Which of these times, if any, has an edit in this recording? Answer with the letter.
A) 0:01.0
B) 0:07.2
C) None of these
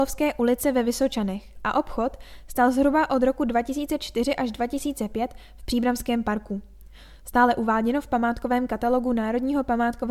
B